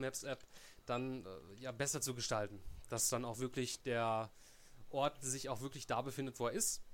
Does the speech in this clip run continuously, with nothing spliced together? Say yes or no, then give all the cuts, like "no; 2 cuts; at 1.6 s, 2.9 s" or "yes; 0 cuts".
yes; 0 cuts